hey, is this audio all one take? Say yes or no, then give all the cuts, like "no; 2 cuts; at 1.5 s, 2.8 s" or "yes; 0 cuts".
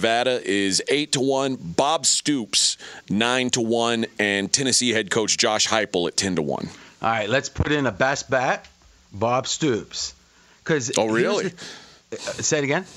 yes; 0 cuts